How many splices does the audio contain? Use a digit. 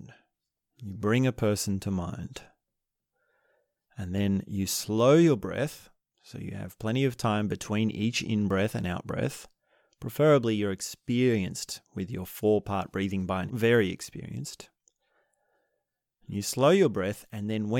1